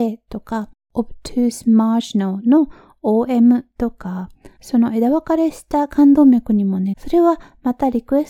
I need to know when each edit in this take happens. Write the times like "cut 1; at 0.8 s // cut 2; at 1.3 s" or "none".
cut 1; at 4.6 s // cut 2; at 6.9 s